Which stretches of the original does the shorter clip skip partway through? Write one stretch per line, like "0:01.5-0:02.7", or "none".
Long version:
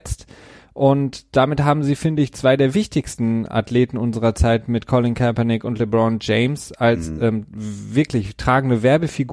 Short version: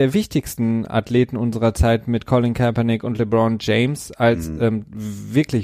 none